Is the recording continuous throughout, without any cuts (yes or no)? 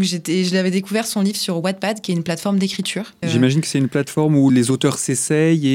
no